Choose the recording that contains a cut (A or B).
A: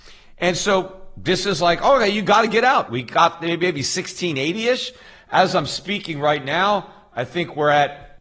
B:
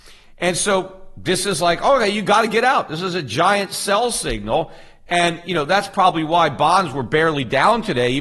A